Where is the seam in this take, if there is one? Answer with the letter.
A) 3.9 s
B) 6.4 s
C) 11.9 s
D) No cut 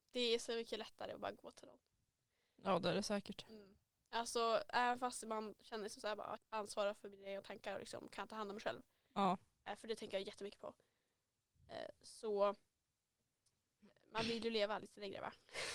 B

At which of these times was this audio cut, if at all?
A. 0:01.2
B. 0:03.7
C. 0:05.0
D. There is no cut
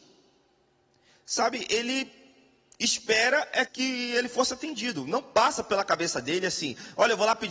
B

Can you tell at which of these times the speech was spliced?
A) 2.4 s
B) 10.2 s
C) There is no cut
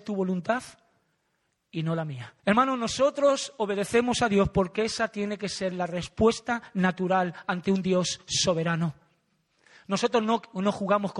A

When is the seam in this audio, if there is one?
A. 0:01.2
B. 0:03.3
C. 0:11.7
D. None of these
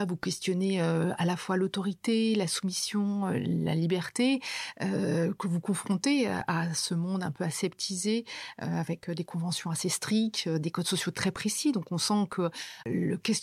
D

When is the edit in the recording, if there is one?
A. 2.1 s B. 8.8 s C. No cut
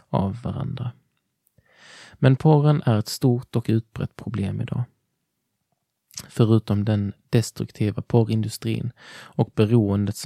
C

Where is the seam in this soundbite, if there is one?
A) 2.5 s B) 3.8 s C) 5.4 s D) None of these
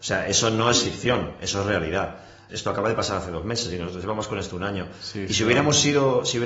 A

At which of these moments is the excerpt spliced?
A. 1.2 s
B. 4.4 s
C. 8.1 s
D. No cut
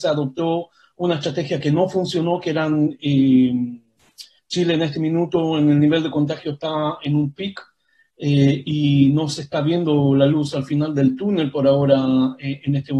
B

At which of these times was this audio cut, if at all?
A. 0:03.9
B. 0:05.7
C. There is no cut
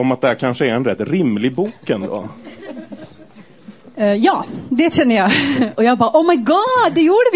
B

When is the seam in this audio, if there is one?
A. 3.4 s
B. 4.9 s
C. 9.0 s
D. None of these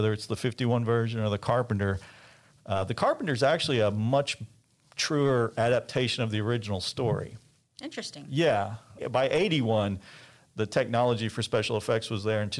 C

